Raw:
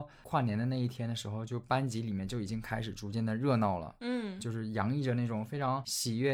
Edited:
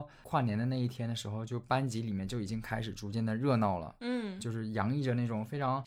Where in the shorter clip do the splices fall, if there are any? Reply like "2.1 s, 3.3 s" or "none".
none